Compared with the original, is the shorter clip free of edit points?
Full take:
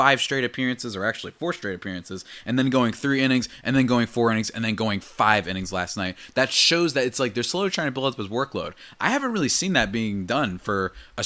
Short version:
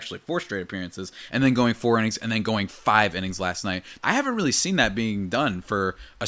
no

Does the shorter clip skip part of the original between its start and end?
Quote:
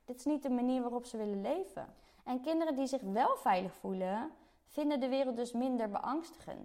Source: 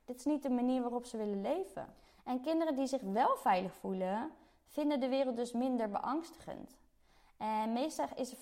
no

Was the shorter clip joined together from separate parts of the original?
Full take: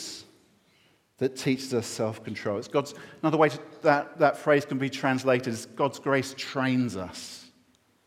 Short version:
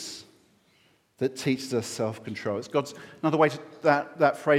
no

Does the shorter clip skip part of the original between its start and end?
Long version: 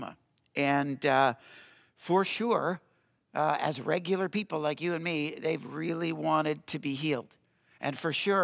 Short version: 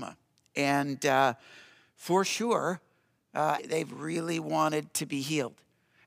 yes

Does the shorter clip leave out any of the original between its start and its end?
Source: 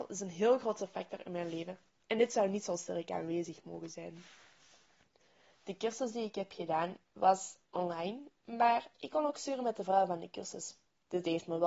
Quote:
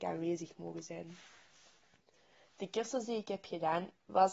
no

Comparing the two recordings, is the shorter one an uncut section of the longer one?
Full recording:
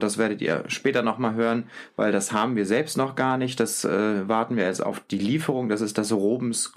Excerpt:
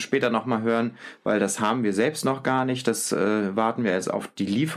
yes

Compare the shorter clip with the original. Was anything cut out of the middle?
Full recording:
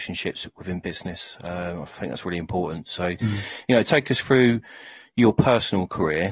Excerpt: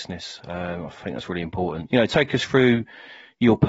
yes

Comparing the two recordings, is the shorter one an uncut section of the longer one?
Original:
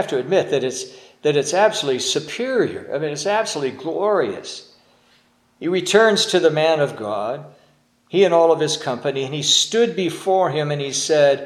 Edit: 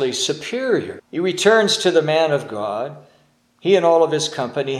no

